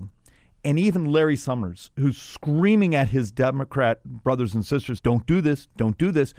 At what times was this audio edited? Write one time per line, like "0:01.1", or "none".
0:05.0